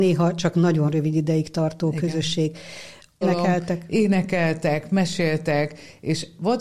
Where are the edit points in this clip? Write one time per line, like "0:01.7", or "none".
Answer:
0:03.2